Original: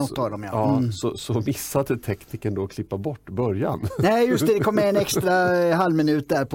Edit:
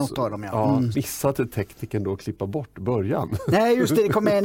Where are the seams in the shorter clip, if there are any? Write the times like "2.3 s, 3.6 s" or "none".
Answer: 0.9 s